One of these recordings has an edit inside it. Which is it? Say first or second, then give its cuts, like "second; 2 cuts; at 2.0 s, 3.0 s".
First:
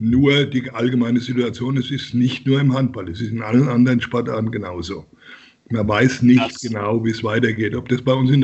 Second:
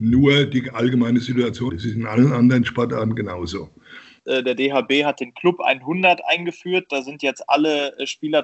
second; 2 cuts; at 1.7 s, 4.2 s